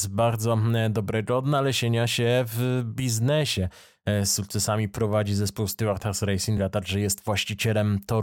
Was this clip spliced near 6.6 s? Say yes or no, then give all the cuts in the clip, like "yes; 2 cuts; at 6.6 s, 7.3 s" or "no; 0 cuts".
no; 0 cuts